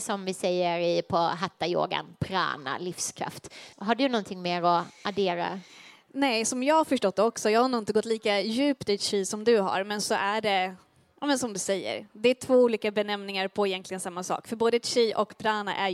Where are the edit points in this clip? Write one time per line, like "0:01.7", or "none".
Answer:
0:03.7